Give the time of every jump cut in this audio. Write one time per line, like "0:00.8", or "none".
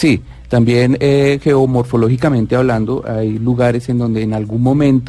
none